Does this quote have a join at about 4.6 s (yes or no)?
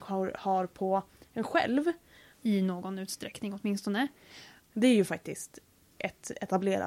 yes